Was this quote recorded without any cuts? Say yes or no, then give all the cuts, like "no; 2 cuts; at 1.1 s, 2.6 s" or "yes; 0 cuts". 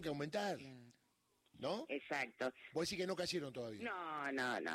no; 1 cut; at 2.7 s